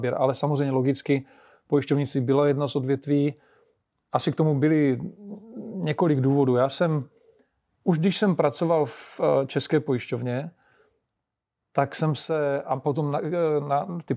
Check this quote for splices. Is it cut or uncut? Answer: uncut